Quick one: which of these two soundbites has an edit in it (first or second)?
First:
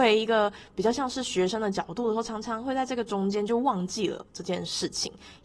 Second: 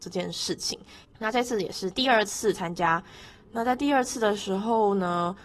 second